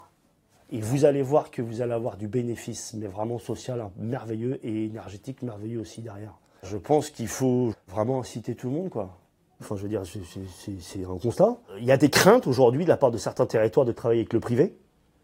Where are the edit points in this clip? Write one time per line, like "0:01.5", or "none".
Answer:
0:06.6
0:07.7
0:09.6